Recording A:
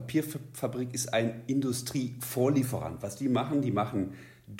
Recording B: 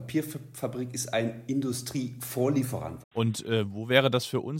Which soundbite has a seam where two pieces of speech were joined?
B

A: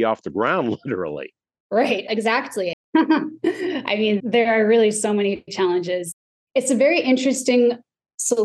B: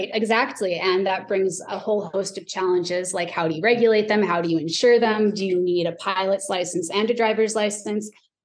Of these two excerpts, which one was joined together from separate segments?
A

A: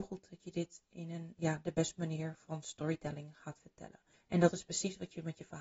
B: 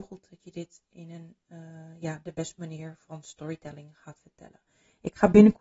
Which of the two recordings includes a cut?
A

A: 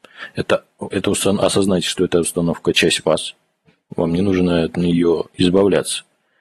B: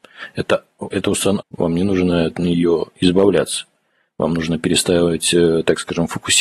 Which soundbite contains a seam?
B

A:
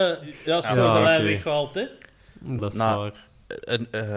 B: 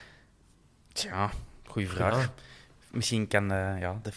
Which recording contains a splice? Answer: A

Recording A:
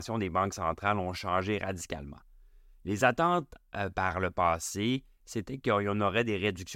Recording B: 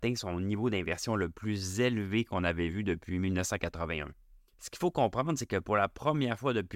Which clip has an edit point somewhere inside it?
B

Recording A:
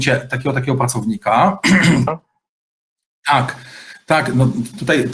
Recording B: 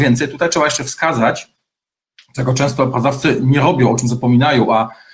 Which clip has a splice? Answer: A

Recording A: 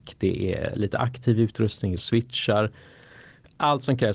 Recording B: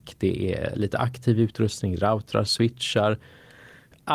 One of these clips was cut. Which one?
A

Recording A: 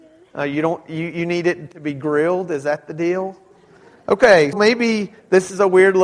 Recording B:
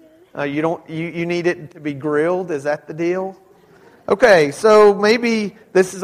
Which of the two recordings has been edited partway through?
A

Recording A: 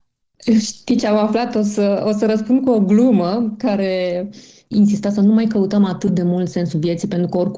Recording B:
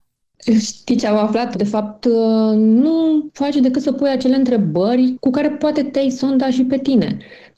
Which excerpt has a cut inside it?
B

